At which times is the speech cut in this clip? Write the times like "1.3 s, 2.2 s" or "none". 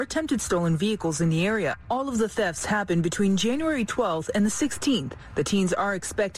none